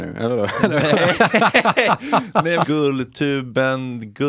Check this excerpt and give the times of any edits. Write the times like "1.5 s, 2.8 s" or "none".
2.6 s

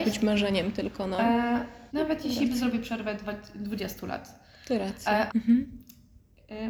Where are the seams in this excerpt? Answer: 1.9 s, 5.3 s

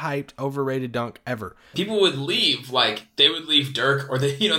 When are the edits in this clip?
1.7 s

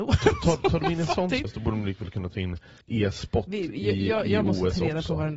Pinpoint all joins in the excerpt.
1.4 s, 2.8 s

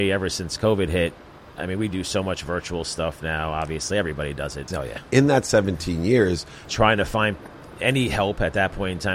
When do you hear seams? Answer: 4.7 s, 6.7 s

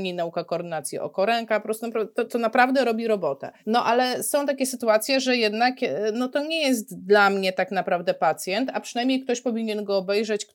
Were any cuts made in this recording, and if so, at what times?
2.3 s, 3.6 s

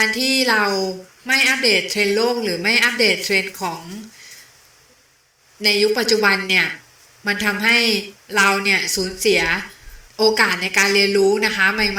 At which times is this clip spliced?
10.1 s

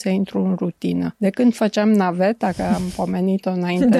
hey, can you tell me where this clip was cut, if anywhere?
none

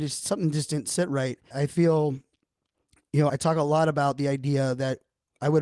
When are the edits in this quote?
1.5 s, 3.3 s

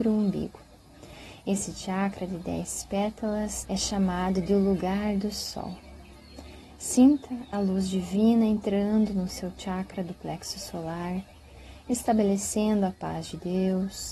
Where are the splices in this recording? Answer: 3.6 s

